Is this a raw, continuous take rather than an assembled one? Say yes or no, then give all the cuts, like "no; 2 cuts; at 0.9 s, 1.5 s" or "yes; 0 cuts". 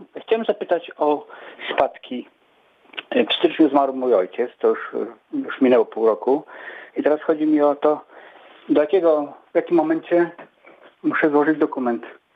yes; 0 cuts